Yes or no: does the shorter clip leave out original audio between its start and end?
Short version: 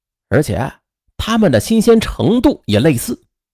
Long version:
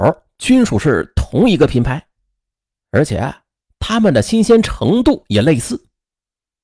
no